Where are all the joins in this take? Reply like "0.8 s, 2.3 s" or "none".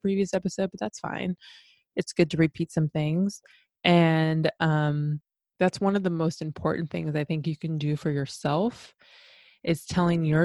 none